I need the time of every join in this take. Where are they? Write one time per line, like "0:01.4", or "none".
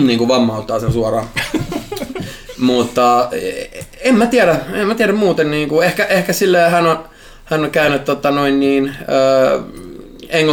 none